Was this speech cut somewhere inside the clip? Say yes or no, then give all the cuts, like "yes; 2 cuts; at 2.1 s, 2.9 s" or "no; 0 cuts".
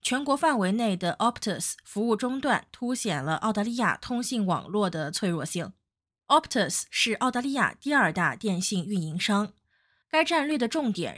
yes; 1 cut; at 10.0 s